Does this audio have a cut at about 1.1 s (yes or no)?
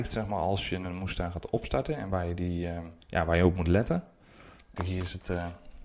no